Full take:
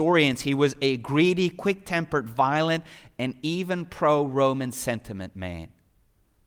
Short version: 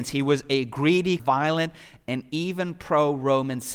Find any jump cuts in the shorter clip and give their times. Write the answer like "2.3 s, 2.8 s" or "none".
1.2 s